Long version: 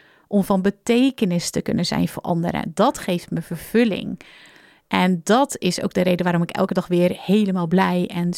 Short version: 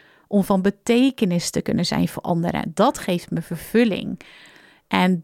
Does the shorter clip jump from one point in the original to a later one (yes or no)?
no